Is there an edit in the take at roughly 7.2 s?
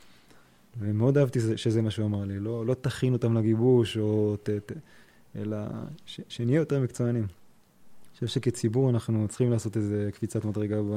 no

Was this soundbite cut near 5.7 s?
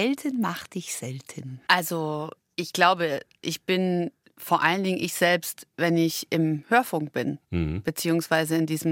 no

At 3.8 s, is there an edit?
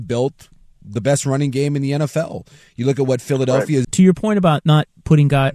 yes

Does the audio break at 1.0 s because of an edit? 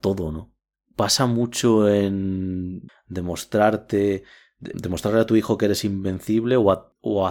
no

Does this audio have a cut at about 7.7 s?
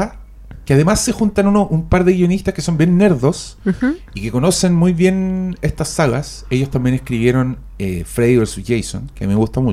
no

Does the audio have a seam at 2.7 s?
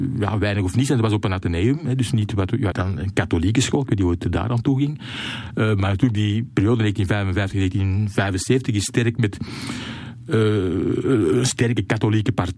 yes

